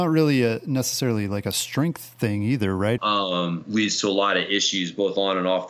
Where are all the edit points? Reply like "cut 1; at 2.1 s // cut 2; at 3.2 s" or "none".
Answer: cut 1; at 3.0 s

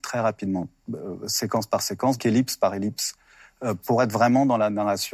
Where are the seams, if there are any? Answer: cut 1; at 2.2 s

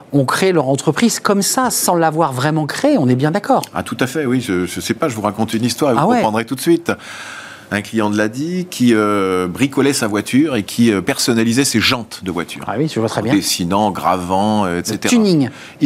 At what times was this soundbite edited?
none

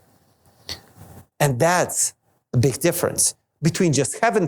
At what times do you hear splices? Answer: cut 1; at 1.3 s

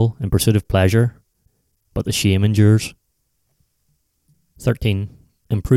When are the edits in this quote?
cut 1; at 1.8 s

